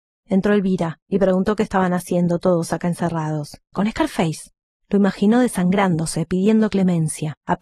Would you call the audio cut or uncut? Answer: cut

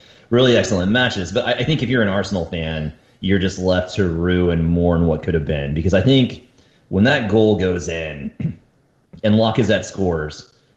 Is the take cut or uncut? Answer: uncut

